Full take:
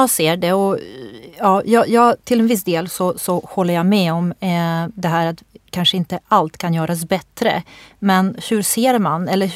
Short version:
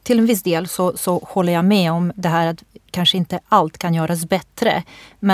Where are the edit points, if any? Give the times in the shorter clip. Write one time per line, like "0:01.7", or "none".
0:02.1